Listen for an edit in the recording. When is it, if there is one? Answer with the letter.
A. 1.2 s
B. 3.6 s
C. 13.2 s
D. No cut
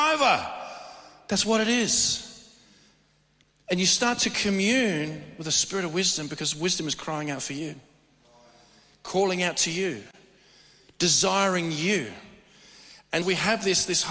C